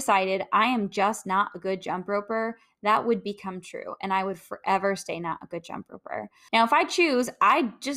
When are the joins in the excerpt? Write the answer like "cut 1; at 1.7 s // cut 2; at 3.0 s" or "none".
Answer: cut 1; at 6.5 s